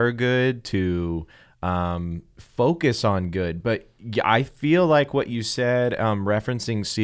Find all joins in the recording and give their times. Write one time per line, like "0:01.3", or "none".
none